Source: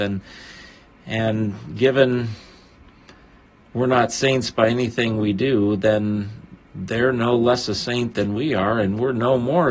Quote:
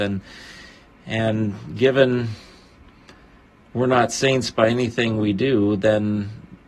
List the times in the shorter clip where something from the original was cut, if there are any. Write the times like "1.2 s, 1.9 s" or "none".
none